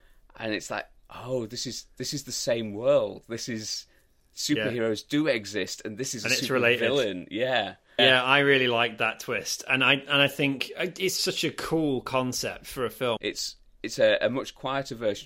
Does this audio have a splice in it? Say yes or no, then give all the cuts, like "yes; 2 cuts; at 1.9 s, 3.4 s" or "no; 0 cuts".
yes; 3 cuts; at 8.0 s, 11.2 s, 13.2 s